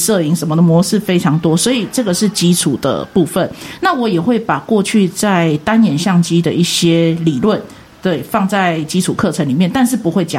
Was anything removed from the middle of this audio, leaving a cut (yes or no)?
no